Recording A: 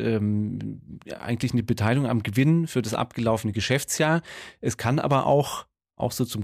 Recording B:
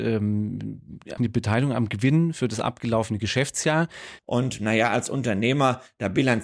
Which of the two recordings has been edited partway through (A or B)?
B